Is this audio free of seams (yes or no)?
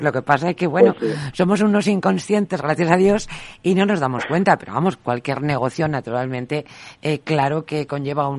yes